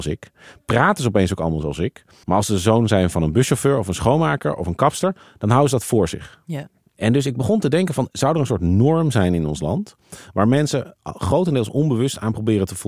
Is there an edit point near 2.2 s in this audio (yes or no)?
yes